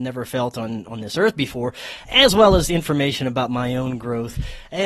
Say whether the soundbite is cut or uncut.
uncut